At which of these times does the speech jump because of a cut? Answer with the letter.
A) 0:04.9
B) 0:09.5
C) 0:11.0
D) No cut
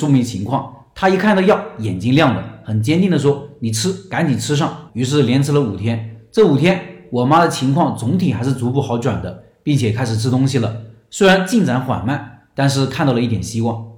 A